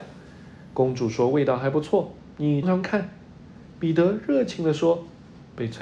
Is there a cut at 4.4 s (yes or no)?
no